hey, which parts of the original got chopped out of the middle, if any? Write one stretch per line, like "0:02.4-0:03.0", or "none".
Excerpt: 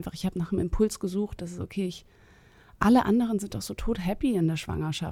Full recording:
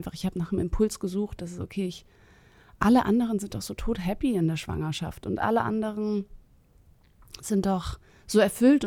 none